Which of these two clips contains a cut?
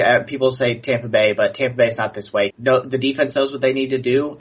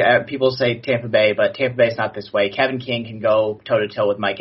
first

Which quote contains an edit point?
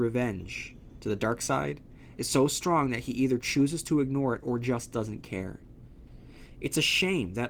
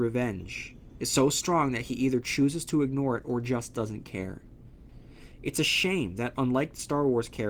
second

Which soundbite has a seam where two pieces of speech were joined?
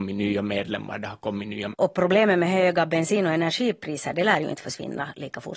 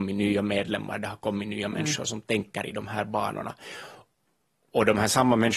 first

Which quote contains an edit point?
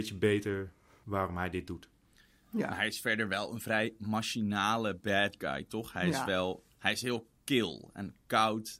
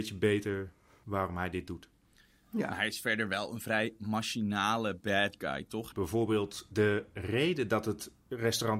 second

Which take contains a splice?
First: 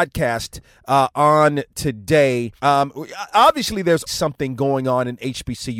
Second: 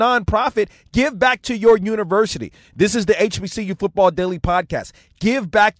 first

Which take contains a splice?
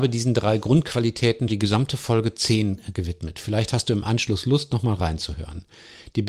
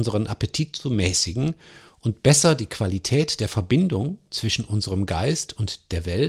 first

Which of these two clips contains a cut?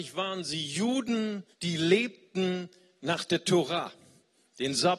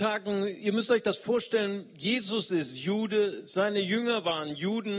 first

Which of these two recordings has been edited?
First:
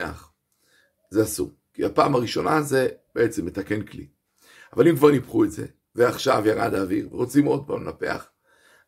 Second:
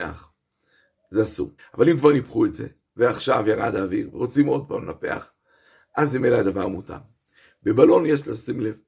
second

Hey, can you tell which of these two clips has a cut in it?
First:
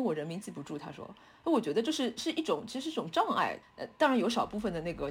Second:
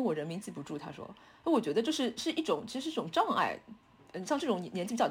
first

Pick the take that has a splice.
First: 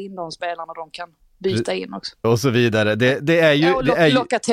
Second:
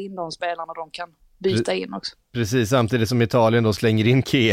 first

